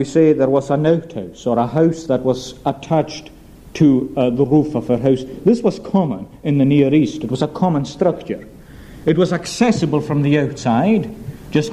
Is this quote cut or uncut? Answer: uncut